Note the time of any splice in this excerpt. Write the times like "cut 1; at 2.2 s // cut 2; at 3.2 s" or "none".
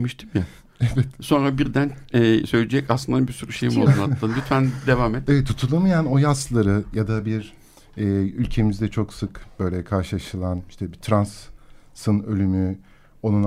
none

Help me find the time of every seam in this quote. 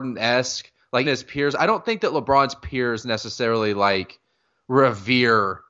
cut 1; at 1.0 s

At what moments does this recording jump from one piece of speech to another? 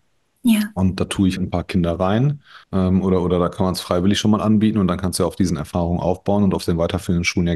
cut 1; at 1.4 s // cut 2; at 2.6 s

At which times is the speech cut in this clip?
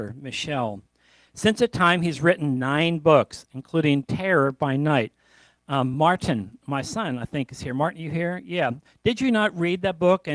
none

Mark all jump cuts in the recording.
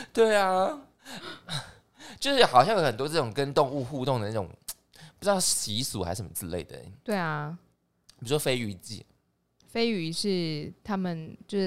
none

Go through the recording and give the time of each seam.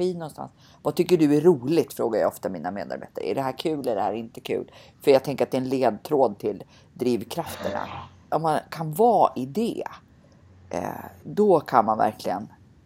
cut 1; at 8.3 s // cut 2; at 11.2 s

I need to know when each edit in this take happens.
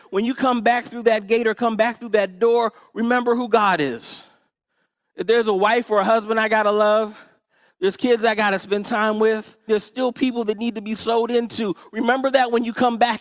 cut 1; at 9.7 s

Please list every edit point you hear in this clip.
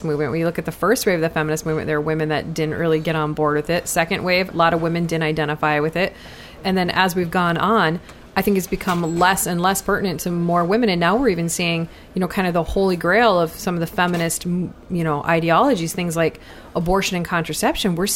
cut 1; at 4.5 s

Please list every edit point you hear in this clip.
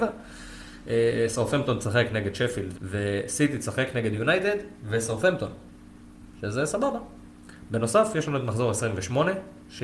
cut 1; at 2.7 s

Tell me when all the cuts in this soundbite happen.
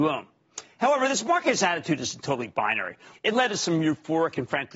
cut 1; at 3.1 s

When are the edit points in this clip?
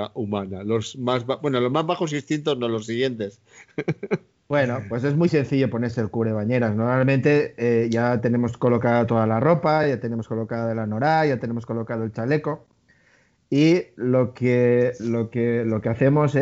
none

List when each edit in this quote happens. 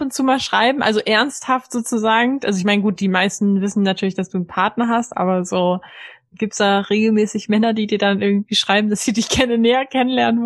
none

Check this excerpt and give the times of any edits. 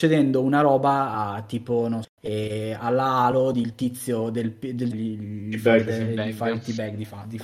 cut 1; at 2.0 s // cut 2; at 4.9 s

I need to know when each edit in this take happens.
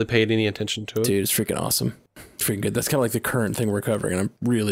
cut 1; at 2.4 s

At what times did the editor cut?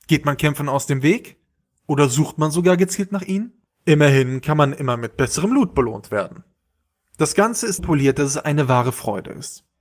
cut 1; at 7.8 s

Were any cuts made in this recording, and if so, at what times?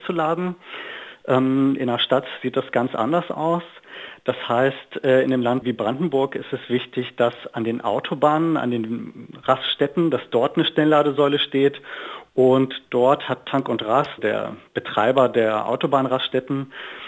cut 1; at 14.2 s

